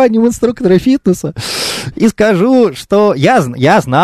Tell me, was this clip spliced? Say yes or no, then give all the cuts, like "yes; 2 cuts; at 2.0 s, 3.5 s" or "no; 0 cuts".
no; 0 cuts